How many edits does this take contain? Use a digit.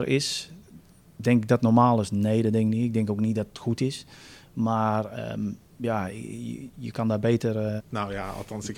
1